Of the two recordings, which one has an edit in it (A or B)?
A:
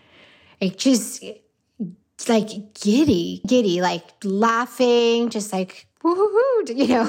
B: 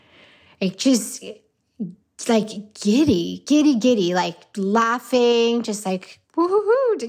A